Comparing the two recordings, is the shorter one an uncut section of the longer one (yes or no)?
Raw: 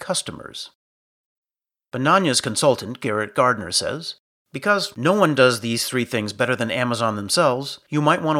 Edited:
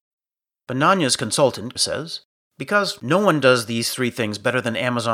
no